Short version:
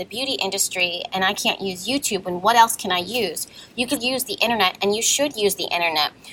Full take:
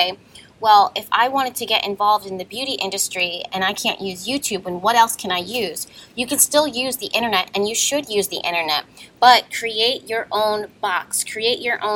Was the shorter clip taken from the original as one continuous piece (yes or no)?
no